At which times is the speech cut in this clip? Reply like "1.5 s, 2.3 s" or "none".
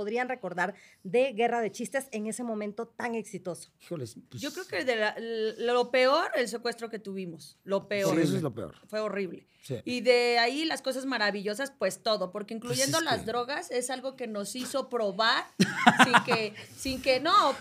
none